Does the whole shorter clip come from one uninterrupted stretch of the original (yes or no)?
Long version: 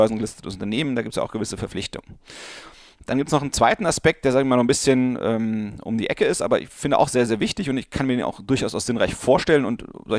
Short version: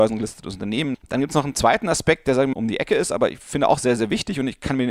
no